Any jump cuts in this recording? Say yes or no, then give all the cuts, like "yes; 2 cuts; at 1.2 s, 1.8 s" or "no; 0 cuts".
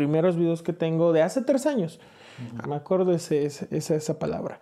yes; 2 cuts; at 2.6 s, 3.7 s